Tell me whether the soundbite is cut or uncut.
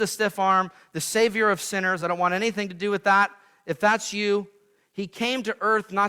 uncut